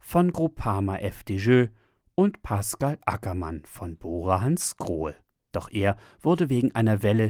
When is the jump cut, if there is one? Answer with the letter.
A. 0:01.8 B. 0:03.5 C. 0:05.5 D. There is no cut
C